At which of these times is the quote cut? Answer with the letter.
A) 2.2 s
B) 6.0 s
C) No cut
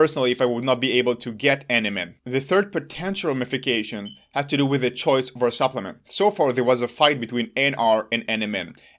A